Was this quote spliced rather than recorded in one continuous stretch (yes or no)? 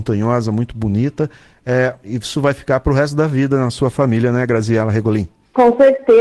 no